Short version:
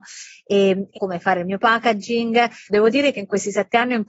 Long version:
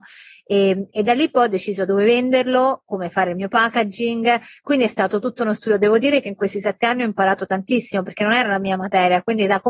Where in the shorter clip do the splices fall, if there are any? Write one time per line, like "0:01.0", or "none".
0:00.9
0:02.7